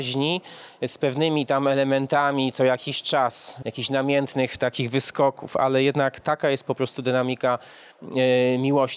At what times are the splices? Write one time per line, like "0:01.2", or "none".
0:03.6